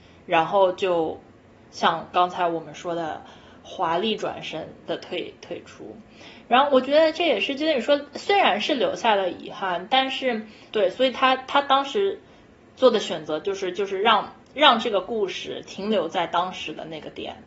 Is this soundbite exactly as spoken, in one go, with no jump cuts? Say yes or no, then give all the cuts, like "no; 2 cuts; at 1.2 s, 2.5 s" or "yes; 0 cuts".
no; 1 cut; at 10.7 s